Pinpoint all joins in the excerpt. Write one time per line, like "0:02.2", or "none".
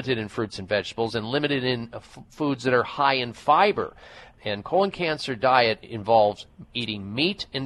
0:04.4

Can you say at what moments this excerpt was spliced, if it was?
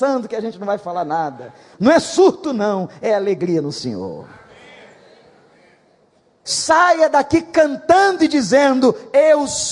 0:01.7
0:06.4

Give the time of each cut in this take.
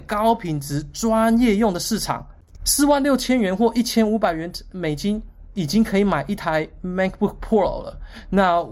0:02.5

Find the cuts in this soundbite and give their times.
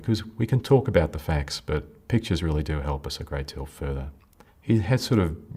0:04.5

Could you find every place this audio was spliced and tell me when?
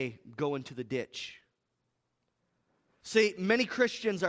0:03.0

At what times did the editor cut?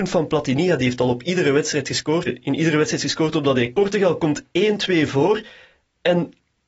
0:02.3
0:03.7

